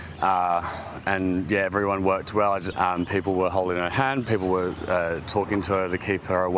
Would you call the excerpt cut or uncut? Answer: cut